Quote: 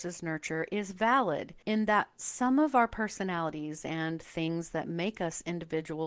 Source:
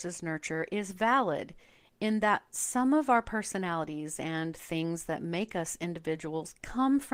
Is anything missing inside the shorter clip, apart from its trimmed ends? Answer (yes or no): yes